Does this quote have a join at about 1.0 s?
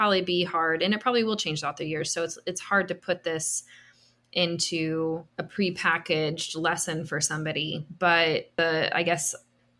no; 1 cut; at 5.3 s

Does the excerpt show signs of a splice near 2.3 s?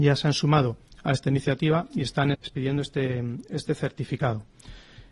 yes; 1 cut; at 2.3 s

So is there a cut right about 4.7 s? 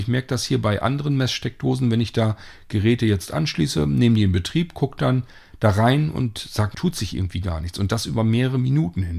no; 1 cut; at 6.7 s

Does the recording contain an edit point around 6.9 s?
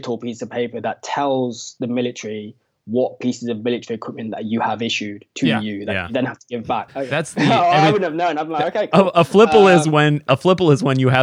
yes; 1 cut; at 6.9 s

